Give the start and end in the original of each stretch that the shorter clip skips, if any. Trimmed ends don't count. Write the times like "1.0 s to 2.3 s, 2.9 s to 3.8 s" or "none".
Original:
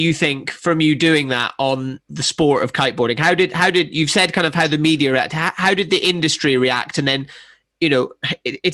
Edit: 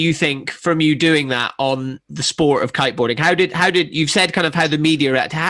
none